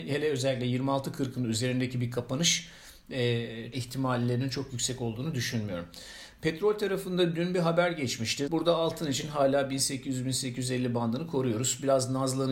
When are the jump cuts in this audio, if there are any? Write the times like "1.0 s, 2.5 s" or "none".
3.7 s, 8.5 s